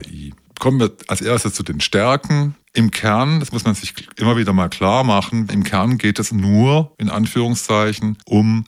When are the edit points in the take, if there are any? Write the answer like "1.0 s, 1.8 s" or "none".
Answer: none